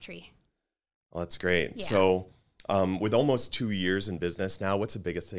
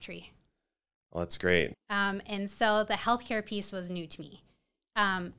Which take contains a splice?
second; 1 cut; at 1.7 s

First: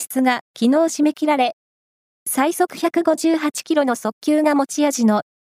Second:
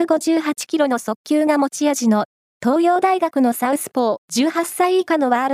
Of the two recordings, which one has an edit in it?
second; 1 cut; at 4.2 s

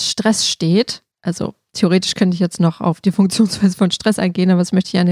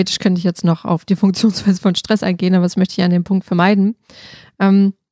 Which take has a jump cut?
first; 1 cut; at 1.1 s

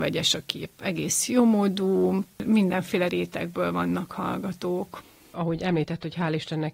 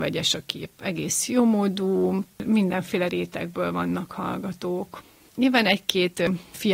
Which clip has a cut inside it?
second; 1 cut; at 5.3 s

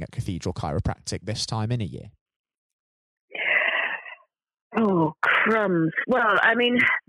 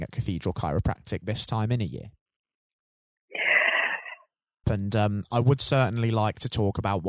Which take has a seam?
second; 1 cut; at 4.6 s

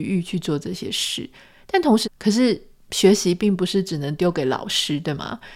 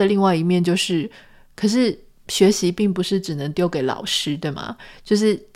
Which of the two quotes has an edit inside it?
first; 1 cut; at 2.0 s

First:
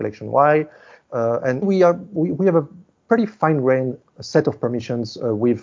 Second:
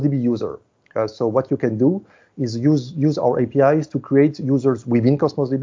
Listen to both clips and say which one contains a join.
first; 1 cut; at 1.6 s

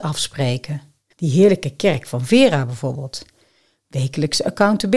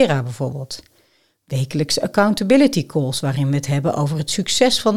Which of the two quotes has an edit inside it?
first; 1 cut; at 1.1 s

